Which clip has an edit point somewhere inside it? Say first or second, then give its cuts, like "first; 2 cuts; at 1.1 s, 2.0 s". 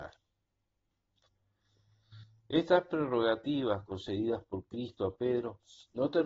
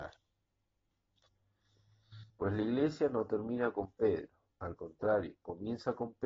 second; 1 cut; at 2.3 s